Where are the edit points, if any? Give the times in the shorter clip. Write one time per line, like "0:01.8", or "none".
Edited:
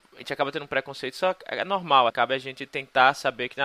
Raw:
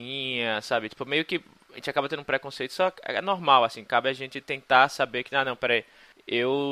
0:02.1